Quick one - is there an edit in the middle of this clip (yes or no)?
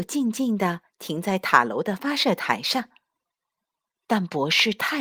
no